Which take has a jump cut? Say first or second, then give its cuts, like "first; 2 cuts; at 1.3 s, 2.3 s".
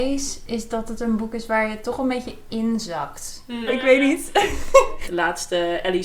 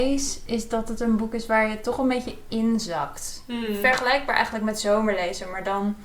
first; 2 cuts; at 3.7 s, 5.0 s